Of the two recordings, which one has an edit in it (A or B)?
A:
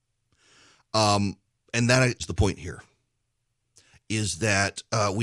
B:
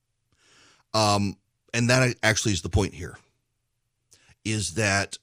A